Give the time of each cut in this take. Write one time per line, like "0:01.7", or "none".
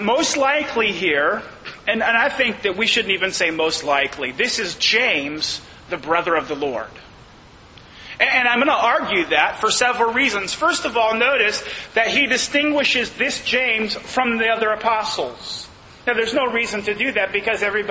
none